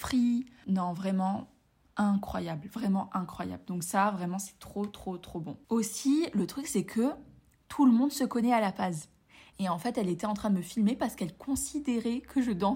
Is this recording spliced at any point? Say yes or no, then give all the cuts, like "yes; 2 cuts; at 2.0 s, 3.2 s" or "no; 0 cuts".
yes; 1 cut; at 9.5 s